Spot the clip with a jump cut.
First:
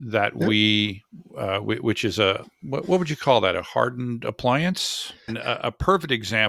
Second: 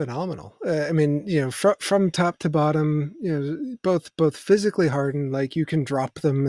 first; 2 cuts; at 2.4 s, 5.3 s

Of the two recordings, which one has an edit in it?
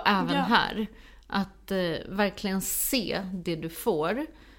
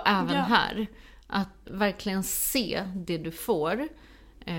second; 1 cut; at 1.6 s

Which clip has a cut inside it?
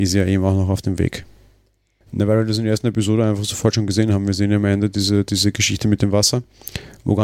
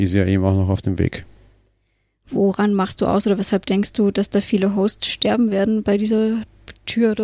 first; 1 cut; at 2.0 s

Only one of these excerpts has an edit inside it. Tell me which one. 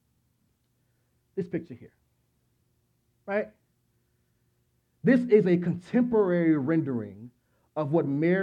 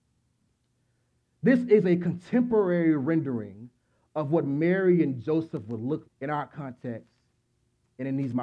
second; 2 cuts; at 1.2 s, 6.0 s

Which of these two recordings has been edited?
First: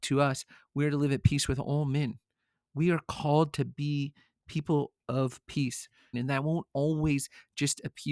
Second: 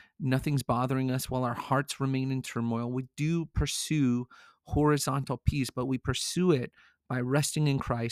first; 1 cut; at 6.1 s

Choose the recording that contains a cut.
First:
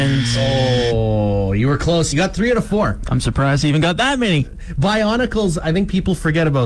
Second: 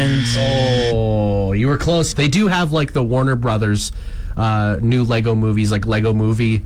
second; 1 cut; at 2.1 s

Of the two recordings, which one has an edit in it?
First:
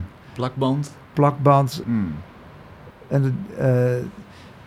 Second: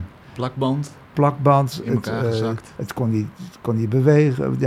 first; 2 cuts; at 1.8 s, 2.9 s

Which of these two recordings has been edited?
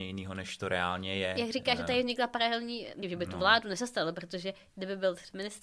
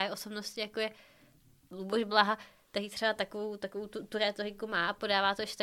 first; 1 cut; at 3.0 s

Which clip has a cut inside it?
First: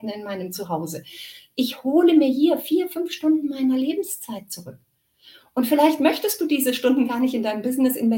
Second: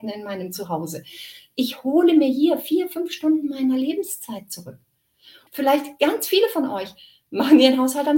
second; 1 cut; at 5.5 s

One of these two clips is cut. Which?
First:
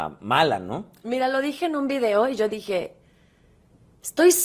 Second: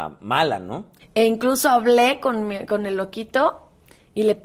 second; 1 cut; at 1.0 s

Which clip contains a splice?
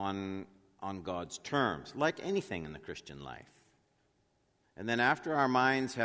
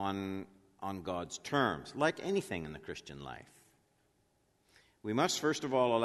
first; 1 cut; at 4.6 s

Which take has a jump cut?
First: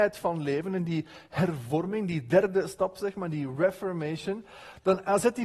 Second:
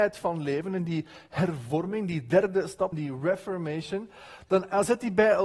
second; 1 cut; at 2.9 s

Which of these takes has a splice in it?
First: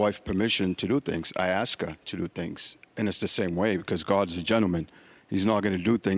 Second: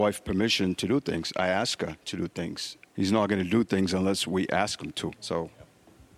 second; 2 cuts; at 2.9 s, 5.1 s

